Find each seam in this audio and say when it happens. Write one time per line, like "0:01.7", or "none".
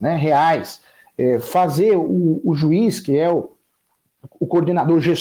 none